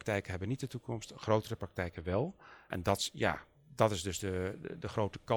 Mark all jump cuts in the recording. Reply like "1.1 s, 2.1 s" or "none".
none